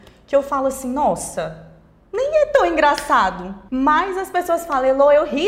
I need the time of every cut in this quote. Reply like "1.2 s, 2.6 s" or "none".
3.7 s